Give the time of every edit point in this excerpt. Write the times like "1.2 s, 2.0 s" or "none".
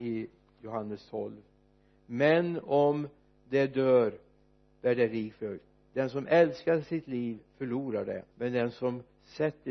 8.3 s